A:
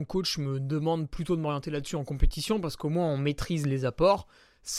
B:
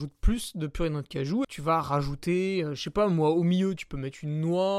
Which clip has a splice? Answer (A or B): B